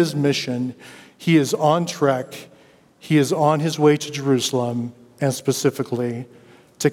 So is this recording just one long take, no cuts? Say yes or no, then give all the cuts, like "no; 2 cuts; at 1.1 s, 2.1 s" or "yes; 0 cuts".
yes; 0 cuts